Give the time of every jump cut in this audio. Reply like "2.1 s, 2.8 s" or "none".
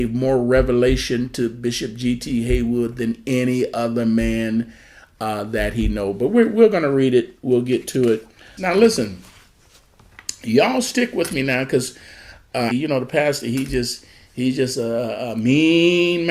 8.6 s, 12.7 s